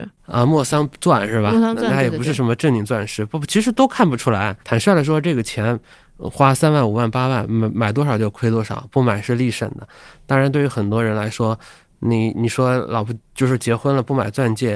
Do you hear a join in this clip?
yes; 1 cut; at 4.6 s

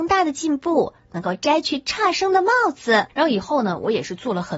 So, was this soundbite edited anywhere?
yes; 1 cut; at 3.1 s

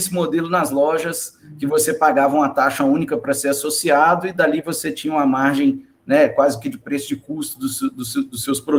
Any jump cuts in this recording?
no; 0 cuts

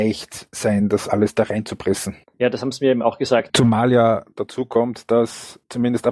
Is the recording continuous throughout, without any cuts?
no; 1 cut; at 3.5 s

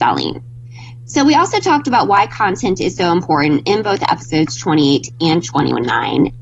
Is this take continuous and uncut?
yes; 0 cuts

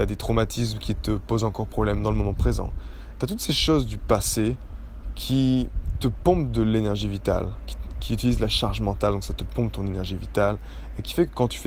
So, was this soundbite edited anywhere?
no; 0 cuts

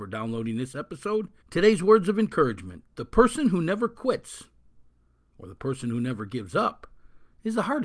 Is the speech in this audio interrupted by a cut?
yes; 1 cut; at 1.4 s

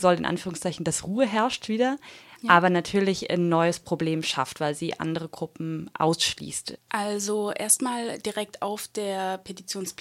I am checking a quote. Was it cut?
yes; 1 cut; at 6.8 s

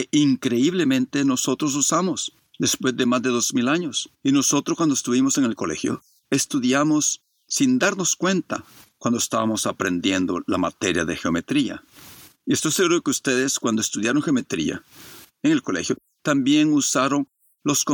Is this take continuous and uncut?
no; 1 cut; at 4.1 s

